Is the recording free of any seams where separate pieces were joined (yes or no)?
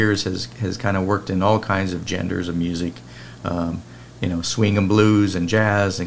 yes